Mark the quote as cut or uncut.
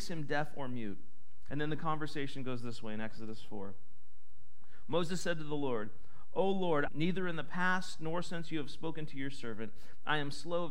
cut